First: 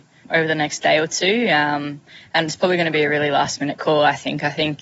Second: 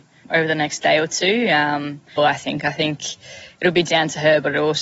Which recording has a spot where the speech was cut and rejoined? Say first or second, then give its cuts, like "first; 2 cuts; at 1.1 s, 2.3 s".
second; 1 cut; at 2.2 s